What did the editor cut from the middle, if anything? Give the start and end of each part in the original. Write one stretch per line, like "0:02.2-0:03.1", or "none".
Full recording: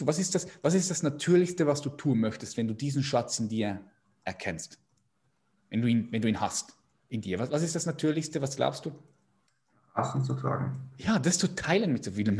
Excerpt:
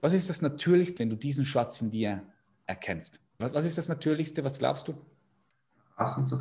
0:01.6-0:02.5
0:05.0-0:07.4